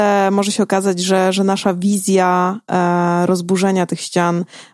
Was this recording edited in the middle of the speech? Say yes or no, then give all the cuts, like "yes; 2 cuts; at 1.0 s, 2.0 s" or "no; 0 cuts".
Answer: no; 0 cuts